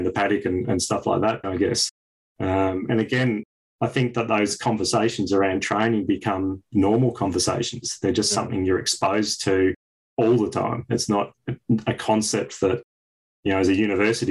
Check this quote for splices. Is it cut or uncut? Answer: cut